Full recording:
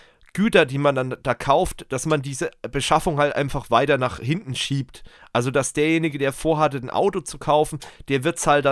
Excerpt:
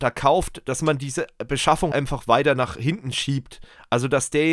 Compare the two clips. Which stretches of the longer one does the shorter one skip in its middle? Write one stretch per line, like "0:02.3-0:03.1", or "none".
0:03.2-0:03.3